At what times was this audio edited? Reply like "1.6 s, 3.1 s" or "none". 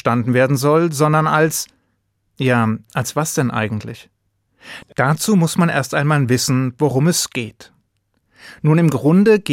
4.8 s